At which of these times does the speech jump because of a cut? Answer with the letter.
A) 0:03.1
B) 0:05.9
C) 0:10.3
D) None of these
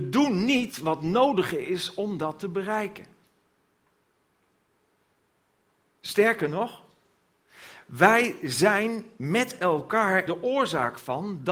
C